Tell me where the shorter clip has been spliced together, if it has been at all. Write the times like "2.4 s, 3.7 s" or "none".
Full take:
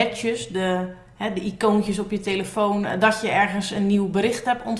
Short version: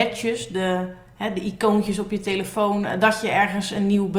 none